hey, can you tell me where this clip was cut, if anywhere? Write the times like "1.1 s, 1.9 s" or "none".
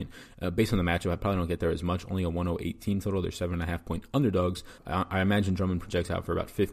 4.8 s